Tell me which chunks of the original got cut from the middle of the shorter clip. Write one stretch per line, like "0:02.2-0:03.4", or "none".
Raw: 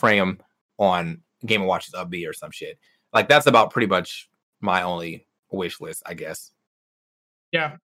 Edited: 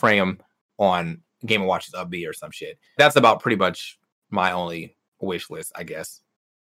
0:03.0-0:03.3